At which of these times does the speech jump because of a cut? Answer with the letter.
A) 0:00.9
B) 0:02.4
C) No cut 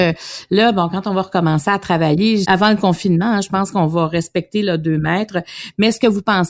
B